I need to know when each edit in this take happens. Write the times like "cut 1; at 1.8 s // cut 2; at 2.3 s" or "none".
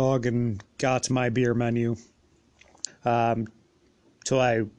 cut 1; at 2.9 s